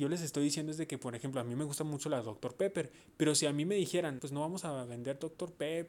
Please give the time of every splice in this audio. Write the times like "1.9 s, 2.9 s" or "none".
4.2 s